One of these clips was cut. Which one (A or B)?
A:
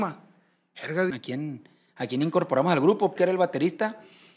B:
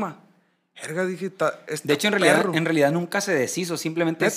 A